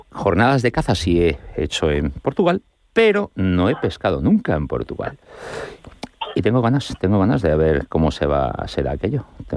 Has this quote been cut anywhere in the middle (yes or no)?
no